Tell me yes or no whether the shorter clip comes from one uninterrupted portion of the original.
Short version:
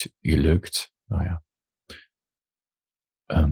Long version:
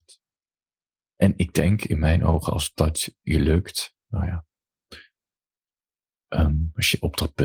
yes